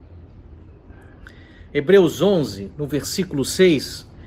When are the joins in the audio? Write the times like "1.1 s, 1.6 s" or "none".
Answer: none